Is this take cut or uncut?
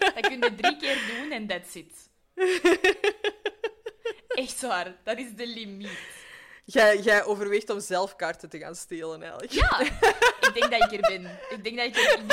uncut